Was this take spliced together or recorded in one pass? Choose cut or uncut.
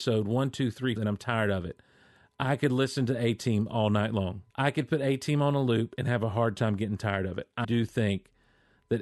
cut